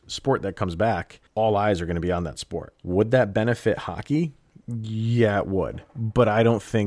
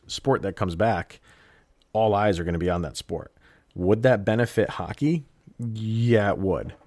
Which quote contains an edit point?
first; 2 cuts; at 1.3 s, 2.8 s

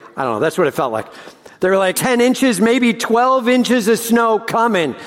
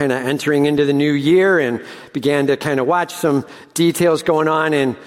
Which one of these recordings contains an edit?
first; 1 cut; at 1.9 s

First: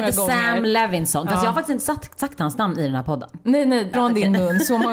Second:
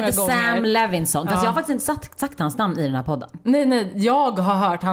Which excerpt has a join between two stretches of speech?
first; 1 cut; at 3.9 s

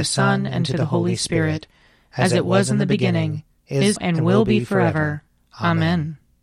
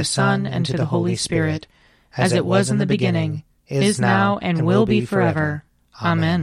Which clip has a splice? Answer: first; 1 cut; at 4.0 s

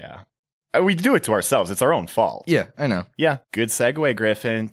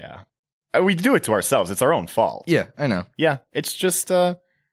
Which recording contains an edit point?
first; 1 cut; at 3.4 s

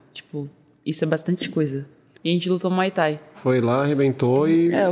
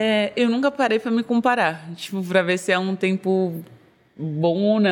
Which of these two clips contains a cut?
first; 2 cuts; at 2.1 s, 3.3 s

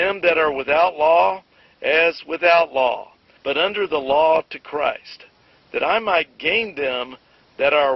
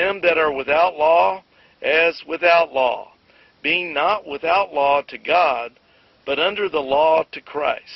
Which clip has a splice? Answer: first; 1 cut; at 3.4 s

